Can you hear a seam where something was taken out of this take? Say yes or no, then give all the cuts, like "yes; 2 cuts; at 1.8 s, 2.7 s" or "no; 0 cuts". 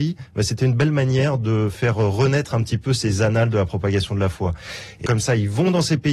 yes; 1 cut; at 5.1 s